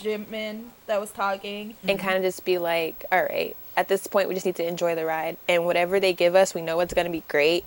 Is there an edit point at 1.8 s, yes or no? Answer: yes